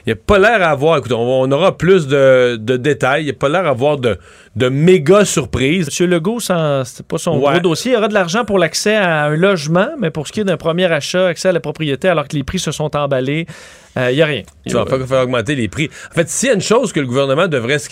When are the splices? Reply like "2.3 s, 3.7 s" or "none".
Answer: 5.9 s, 14.7 s